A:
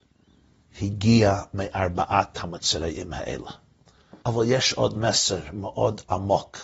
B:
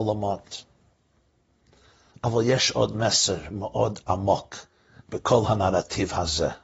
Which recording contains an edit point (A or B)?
A